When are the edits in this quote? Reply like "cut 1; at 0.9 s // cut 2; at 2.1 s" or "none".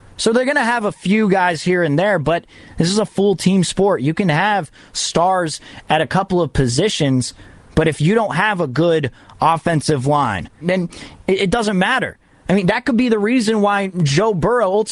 cut 1; at 10.6 s